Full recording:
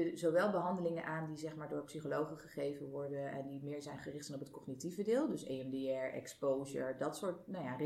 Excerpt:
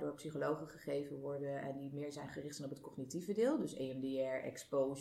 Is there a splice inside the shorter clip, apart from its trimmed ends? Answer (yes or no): no